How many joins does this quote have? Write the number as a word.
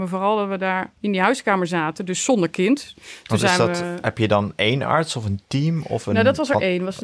two